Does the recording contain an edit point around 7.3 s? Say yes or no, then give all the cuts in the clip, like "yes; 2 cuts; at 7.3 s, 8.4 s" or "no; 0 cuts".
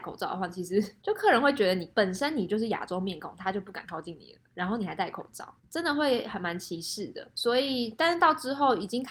no; 1 cut; at 5.6 s